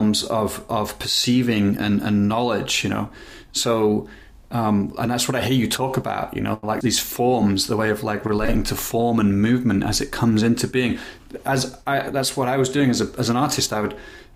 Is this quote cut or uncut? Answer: cut